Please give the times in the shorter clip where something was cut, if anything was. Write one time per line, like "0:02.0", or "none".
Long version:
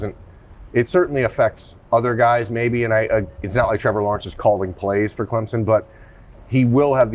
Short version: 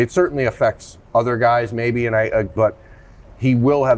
0:02.6